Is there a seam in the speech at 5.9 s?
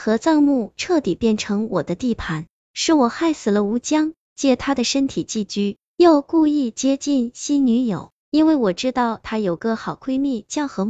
no; 0 cuts

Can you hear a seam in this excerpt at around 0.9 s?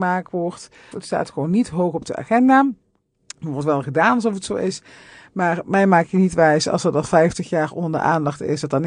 yes; 1 cut; at 0.9 s

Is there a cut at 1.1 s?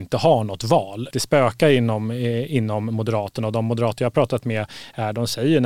yes; 1 cut; at 1.1 s

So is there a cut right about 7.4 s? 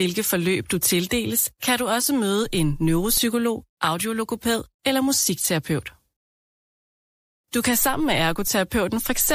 yes; 1 cut; at 7.4 s

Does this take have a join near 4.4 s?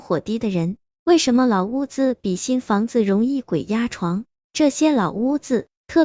yes; 2 cuts; at 0.9 s, 4.4 s

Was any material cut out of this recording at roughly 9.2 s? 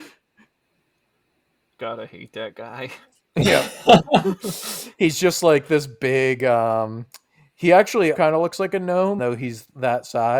yes; 2 cuts; at 8.1 s, 9.2 s

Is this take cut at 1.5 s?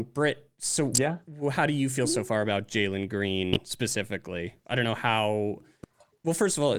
no; 0 cuts

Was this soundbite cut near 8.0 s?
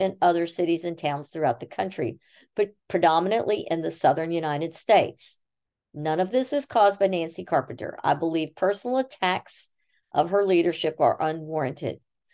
no; 0 cuts

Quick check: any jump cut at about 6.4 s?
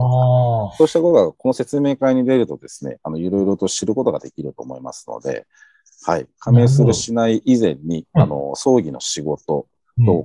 no; 0 cuts

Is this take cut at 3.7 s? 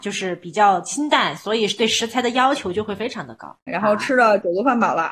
yes; 1 cut; at 3.7 s

